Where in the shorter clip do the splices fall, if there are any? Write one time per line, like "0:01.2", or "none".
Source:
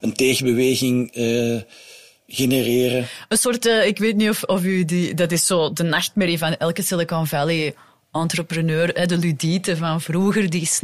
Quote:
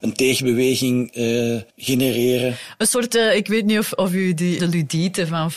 0:01.7
0:04.6